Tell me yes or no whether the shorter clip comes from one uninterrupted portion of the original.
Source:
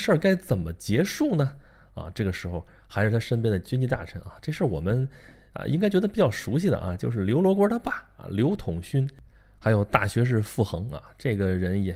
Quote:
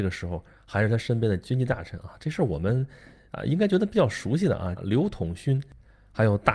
no